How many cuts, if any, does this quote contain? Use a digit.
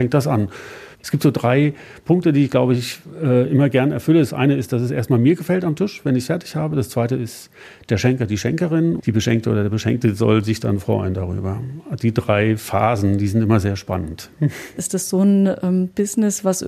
3